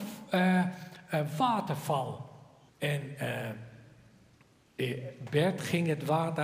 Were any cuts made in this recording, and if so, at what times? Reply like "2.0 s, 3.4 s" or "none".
2.7 s